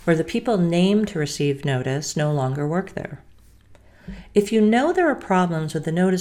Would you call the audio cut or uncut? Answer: uncut